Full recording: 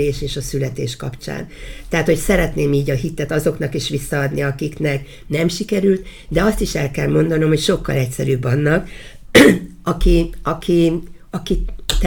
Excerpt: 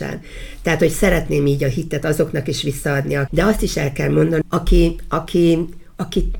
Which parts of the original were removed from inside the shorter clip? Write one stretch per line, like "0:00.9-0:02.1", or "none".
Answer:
0:04.5-0:06.3
0:07.4-0:09.8